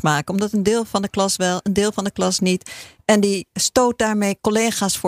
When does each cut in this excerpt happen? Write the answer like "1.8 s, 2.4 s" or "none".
none